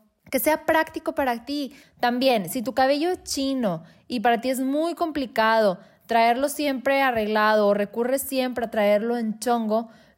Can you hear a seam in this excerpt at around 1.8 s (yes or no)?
yes